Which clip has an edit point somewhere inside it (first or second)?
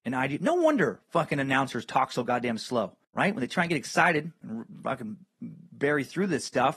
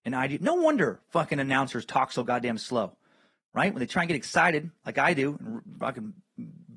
first